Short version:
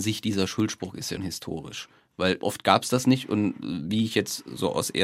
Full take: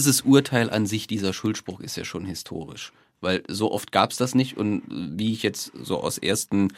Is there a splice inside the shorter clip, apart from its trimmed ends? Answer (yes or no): yes